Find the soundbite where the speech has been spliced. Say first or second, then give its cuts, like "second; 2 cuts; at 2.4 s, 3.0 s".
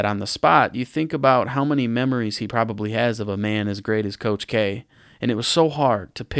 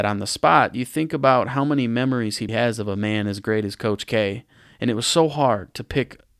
second; 1 cut; at 2.5 s